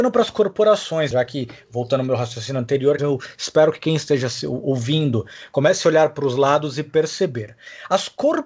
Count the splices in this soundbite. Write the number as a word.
two